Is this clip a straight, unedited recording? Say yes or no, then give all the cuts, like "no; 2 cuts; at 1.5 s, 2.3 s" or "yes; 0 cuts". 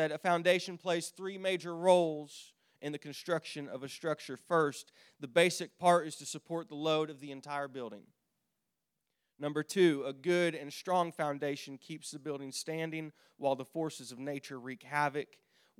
yes; 0 cuts